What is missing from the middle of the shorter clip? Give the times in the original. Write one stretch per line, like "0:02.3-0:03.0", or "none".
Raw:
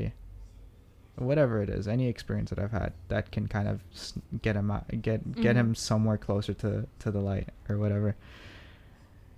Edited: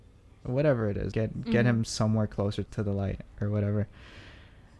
0:01.8-0:05.0
0:06.6-0:06.9